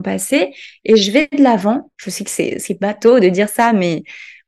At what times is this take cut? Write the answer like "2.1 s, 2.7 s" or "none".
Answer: 1.9 s